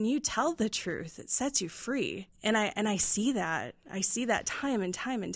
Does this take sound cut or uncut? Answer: cut